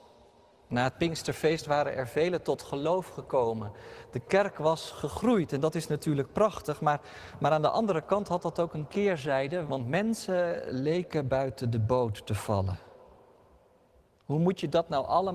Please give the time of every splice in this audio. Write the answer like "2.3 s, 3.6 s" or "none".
9.7 s